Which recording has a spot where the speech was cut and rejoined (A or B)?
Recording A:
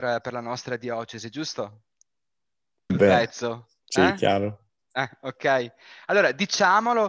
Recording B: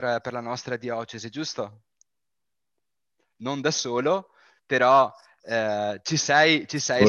A